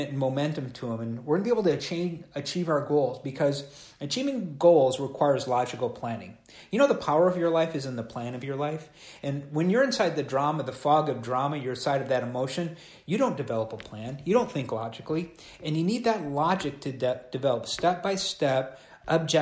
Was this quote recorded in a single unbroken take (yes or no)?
yes